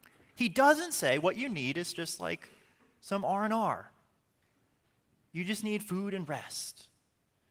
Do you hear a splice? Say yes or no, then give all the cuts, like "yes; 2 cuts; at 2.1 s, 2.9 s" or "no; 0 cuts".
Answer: no; 0 cuts